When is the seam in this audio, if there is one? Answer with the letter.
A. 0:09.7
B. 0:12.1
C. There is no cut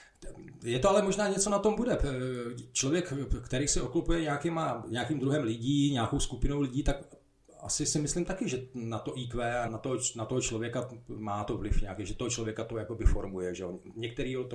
A